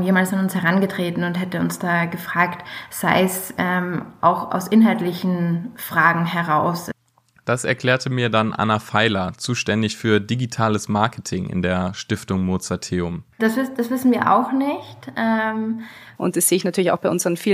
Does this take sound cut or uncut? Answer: cut